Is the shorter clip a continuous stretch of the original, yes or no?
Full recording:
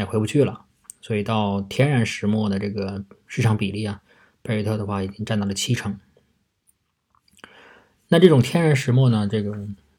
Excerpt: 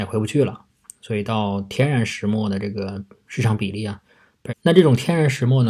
no